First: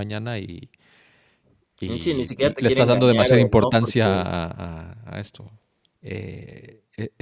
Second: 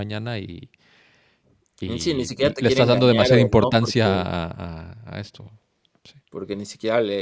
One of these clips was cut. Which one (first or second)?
first